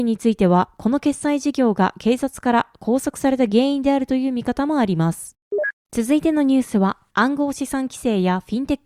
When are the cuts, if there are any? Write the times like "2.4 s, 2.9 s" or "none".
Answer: 7.1 s